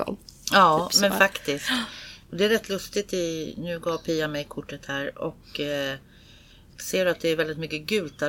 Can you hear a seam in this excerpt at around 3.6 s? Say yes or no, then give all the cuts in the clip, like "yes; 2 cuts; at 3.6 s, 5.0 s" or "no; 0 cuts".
no; 0 cuts